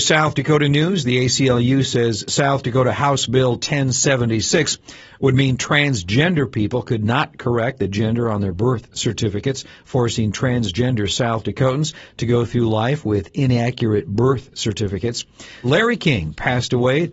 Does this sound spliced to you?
yes; 1 cut; at 15.6 s

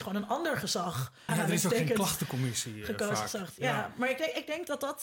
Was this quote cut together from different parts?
yes; 1 cut; at 1.3 s

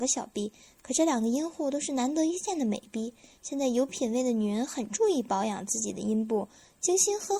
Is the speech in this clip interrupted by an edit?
no; 0 cuts

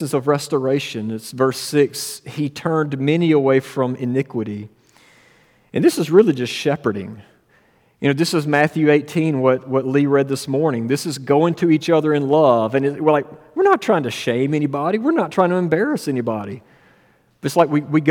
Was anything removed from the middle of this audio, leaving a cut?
no; 0 cuts

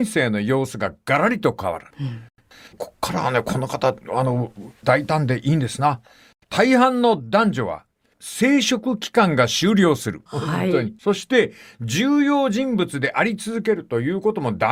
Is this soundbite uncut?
yes; 0 cuts

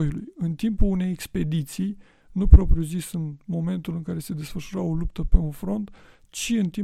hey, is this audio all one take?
yes; 0 cuts

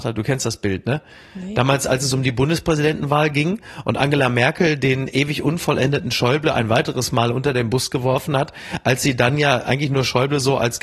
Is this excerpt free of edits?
yes; 0 cuts

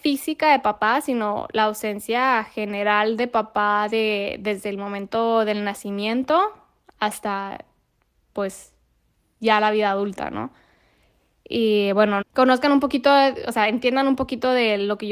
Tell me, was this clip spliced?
yes; 1 cut; at 12.2 s

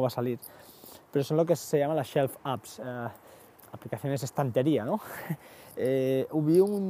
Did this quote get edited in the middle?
no; 0 cuts

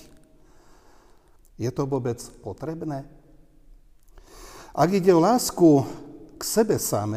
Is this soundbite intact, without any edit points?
no; 1 cut; at 1.4 s

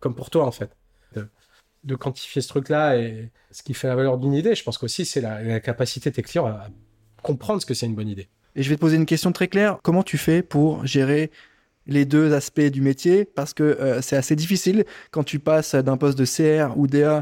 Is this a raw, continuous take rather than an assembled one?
no; 3 cuts; at 1.1 s, 8.4 s, 9.8 s

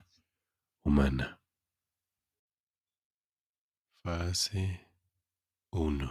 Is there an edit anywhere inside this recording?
no; 0 cuts

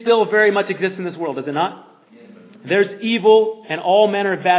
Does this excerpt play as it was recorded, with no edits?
yes; 0 cuts

